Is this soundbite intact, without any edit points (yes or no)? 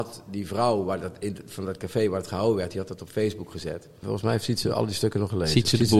no